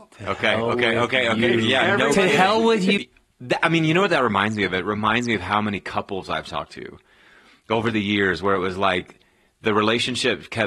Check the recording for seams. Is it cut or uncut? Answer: cut